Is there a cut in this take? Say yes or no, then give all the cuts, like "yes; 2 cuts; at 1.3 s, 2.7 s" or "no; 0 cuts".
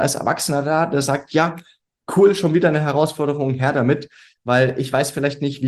no; 0 cuts